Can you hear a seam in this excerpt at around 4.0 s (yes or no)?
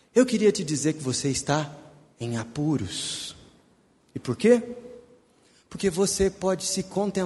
yes